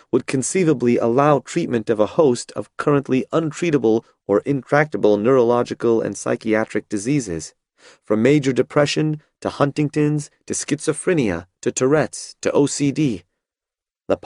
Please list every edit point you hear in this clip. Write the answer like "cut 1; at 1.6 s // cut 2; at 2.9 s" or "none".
none